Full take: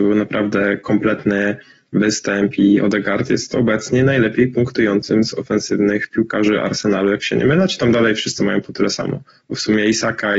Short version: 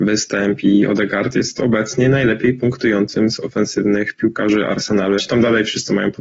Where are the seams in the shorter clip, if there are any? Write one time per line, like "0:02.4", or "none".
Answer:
0:05.2